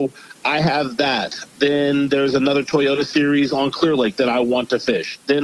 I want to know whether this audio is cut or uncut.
uncut